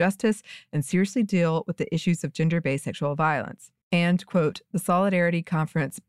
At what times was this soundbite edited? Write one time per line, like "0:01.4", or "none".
0:03.8